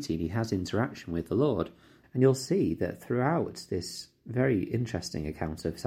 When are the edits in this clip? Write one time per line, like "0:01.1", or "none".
0:02.0